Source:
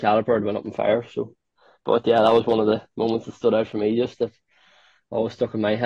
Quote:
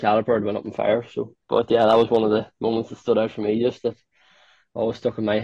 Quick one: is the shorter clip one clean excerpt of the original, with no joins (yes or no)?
no